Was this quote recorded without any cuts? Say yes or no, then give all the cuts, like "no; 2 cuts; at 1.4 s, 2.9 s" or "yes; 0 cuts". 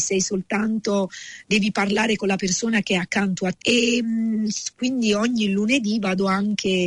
no; 1 cut; at 3.6 s